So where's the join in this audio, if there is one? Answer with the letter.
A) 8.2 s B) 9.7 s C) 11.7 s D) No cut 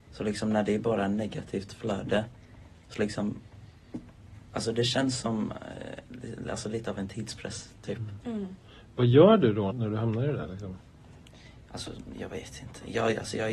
B